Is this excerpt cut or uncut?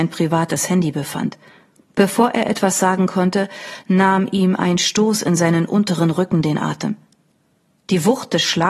uncut